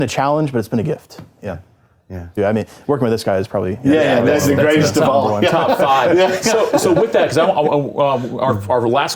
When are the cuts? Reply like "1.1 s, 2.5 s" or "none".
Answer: 2.4 s